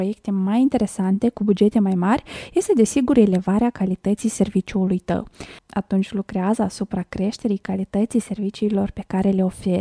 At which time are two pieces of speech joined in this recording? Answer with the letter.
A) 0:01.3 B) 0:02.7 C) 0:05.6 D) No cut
C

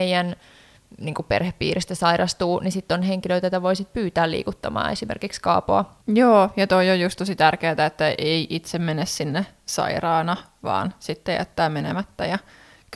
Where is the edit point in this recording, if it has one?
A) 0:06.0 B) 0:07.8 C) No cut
A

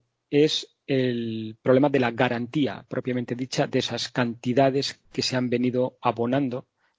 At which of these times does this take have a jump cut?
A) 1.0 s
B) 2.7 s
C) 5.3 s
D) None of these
D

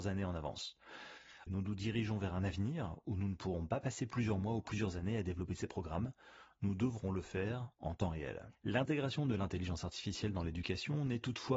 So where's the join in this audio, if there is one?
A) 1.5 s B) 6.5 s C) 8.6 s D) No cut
A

